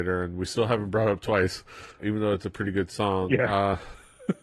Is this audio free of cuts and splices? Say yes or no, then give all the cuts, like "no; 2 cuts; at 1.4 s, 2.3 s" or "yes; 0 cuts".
no; 1 cut; at 2.0 s